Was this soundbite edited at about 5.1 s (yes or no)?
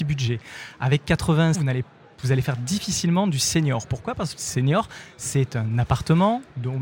no